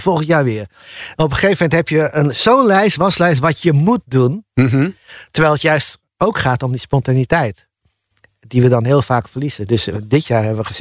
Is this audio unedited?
yes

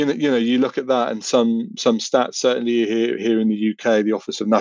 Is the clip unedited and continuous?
yes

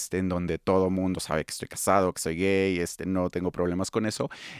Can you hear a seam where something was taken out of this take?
no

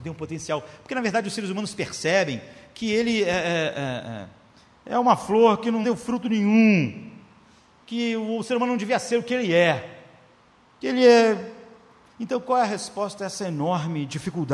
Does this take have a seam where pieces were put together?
yes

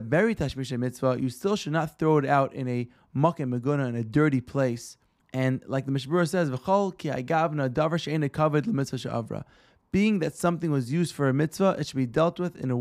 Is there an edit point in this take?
no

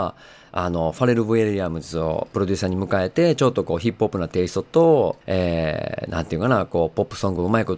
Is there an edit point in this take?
yes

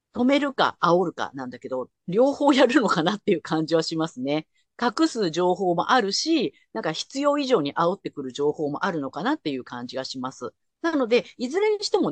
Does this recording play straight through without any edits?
yes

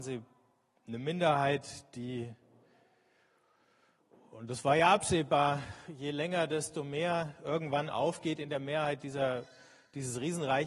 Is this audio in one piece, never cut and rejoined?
yes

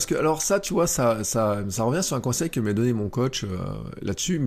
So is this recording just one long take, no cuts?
yes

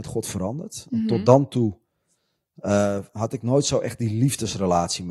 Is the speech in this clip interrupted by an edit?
no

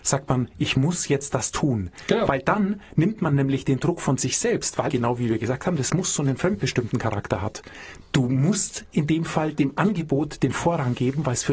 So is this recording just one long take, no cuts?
no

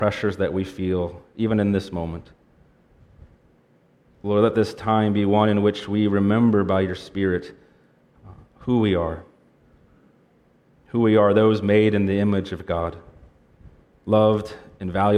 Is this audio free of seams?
yes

